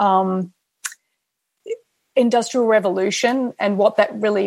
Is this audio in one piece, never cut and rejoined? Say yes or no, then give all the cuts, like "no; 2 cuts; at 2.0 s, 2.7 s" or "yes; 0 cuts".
yes; 0 cuts